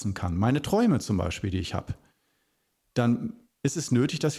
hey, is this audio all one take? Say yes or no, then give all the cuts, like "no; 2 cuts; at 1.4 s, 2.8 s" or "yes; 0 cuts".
yes; 0 cuts